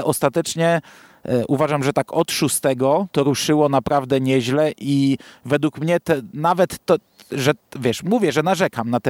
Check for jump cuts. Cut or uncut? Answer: cut